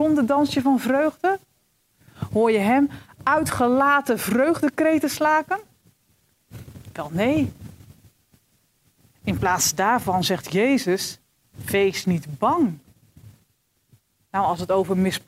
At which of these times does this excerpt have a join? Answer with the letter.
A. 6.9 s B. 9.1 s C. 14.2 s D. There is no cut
D